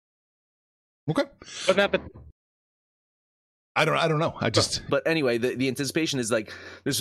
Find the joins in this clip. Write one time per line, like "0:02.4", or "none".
0:04.9